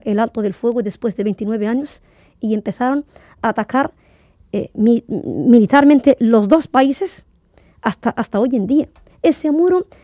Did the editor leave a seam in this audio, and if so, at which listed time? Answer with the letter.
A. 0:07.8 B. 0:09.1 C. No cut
B